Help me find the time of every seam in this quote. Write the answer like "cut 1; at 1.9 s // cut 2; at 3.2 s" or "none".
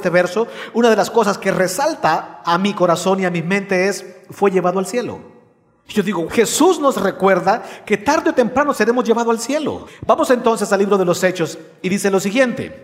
cut 1; at 6.3 s // cut 2; at 9.9 s